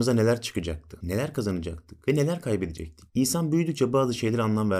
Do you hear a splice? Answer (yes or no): no